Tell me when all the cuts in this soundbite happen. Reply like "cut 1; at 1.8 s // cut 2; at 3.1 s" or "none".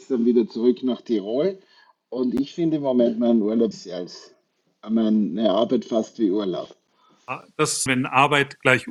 cut 1; at 3.7 s // cut 2; at 7.9 s